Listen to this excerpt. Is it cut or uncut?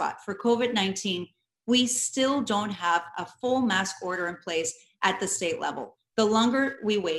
uncut